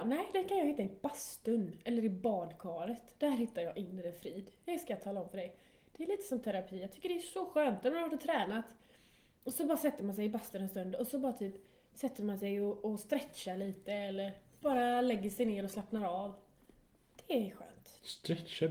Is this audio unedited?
yes; 0 cuts

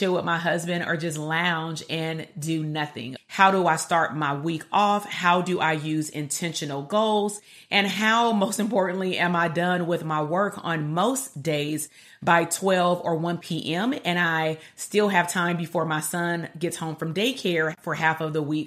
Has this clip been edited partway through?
yes; 1 cut; at 3.2 s

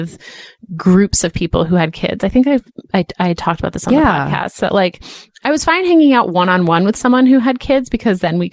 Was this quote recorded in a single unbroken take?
yes; 0 cuts

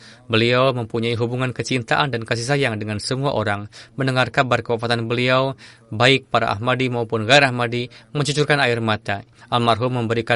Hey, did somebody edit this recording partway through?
yes; 1 cut; at 9.4 s

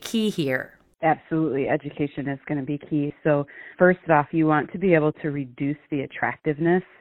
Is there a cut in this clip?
yes; 1 cut; at 3.7 s

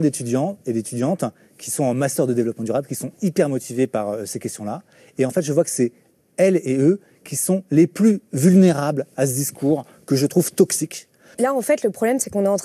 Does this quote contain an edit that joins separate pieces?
yes; 1 cut; at 11.3 s

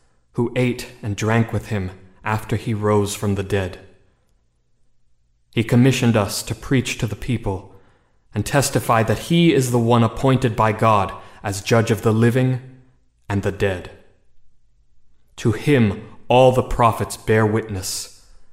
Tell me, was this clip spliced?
no; 0 cuts

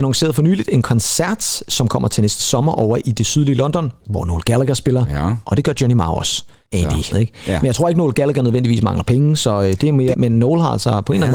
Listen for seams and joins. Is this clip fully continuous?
no; 3 cuts; at 4.0 s, 7.1 s, 10.1 s

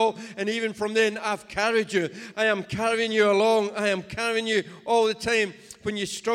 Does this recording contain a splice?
yes; 1 cut; at 2.3 s

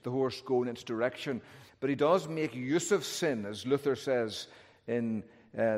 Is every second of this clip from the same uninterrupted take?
no; 1 cut; at 1.7 s

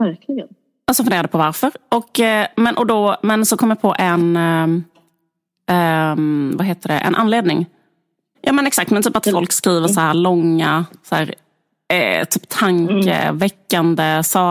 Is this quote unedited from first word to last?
no; 1 cut; at 8.3 s

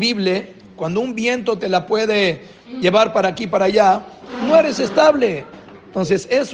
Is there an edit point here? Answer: no; 0 cuts

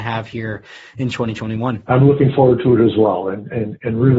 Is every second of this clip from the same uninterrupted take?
yes; 0 cuts

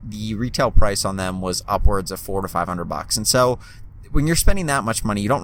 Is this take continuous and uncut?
yes; 0 cuts

